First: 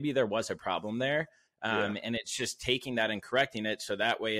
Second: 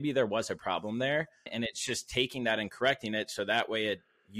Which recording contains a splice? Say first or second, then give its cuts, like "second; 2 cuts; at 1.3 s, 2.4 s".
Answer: second; 1 cut; at 1.5 s